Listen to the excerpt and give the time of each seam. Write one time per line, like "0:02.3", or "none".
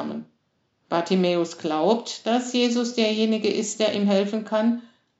none